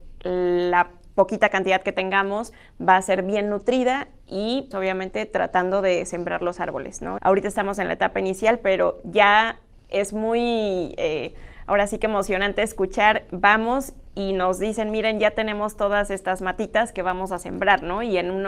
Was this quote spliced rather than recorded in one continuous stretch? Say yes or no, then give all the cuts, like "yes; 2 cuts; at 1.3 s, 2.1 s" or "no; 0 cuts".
yes; 2 cuts; at 4.7 s, 7.2 s